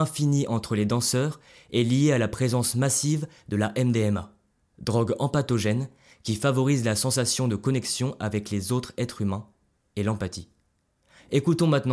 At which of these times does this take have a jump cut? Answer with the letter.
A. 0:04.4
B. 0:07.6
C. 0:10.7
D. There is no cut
D